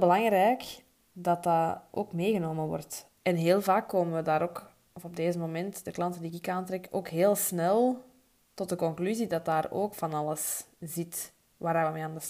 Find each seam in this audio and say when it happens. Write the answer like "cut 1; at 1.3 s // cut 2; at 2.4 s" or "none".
cut 1; at 3.2 s